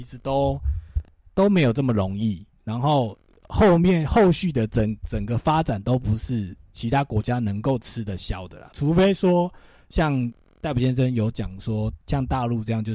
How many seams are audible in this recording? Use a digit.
0